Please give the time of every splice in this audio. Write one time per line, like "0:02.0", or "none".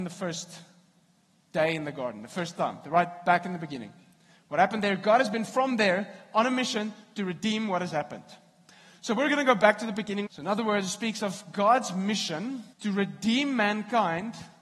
0:10.3
0:12.7